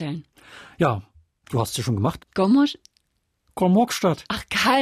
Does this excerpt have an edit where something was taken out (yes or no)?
yes